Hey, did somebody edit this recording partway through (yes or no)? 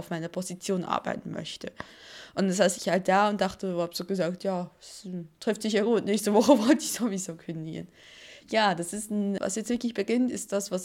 yes